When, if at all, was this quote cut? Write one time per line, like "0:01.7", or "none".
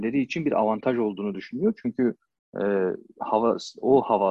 none